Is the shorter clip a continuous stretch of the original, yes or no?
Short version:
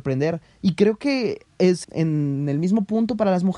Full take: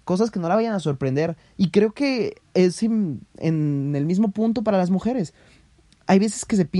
no